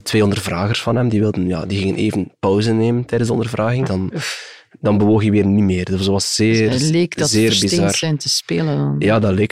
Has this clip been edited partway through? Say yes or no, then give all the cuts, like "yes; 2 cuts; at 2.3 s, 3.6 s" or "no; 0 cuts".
yes; 1 cut; at 3.8 s